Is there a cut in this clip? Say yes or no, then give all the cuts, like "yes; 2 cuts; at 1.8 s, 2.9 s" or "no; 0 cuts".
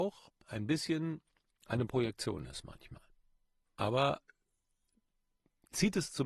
yes; 1 cut; at 3.7 s